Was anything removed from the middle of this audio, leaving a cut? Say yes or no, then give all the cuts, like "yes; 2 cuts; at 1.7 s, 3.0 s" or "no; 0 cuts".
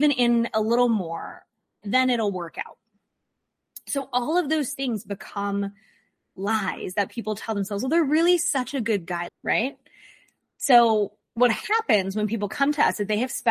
yes; 3 cuts; at 1.8 s, 9.3 s, 11.3 s